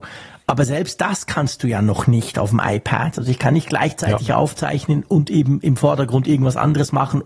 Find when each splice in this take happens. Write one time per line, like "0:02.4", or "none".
none